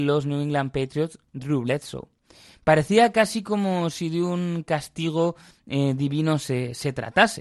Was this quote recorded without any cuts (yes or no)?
yes